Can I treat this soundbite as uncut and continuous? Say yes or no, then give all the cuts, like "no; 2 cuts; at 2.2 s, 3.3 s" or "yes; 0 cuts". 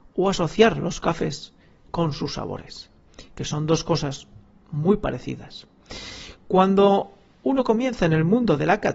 yes; 0 cuts